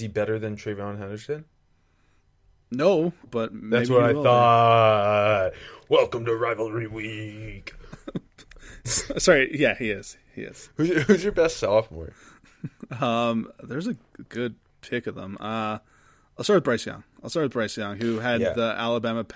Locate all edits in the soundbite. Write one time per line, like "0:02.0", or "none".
0:03.3